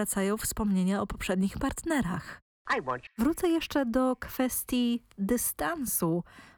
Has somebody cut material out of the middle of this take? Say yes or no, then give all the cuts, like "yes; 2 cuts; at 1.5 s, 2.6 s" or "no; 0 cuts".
yes; 1 cut; at 3.1 s